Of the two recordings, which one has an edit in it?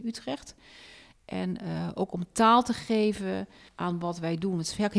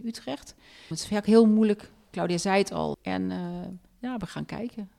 second; 2 cuts; at 0.9 s, 2.9 s

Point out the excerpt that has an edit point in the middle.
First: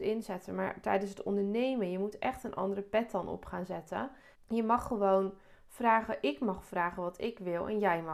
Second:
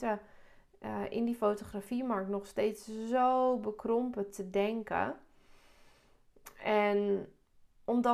first; 1 cut; at 4.3 s

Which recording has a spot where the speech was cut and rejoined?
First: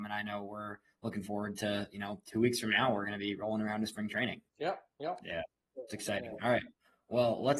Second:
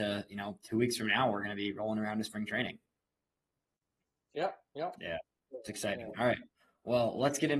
first; 1 cut; at 4.5 s

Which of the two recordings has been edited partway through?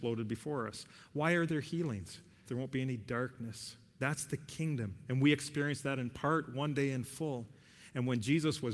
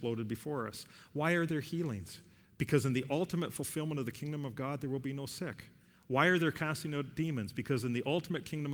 first; 1 cut; at 2.4 s

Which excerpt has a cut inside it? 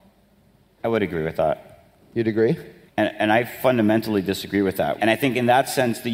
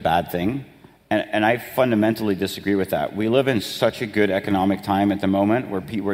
first; 2 cuts; at 2.9 s, 5.0 s

